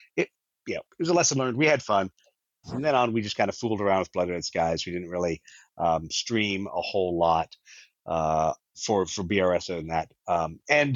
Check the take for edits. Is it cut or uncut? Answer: cut